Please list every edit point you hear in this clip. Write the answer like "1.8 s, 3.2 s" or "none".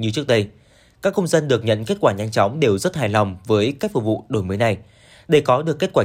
none